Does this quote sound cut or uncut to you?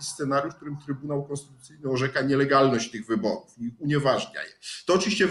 uncut